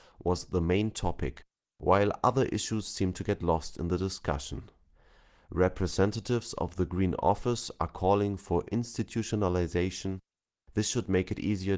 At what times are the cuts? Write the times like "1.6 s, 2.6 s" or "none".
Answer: none